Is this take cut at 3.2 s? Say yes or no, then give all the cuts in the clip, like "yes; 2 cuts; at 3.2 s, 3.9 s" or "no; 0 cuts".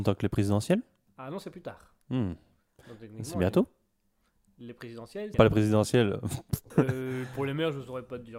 no; 2 cuts; at 5.3 s, 6.7 s